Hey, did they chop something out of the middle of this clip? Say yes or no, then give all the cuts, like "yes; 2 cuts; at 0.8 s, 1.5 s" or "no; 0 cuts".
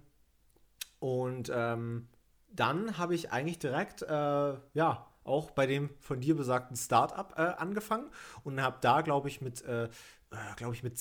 no; 0 cuts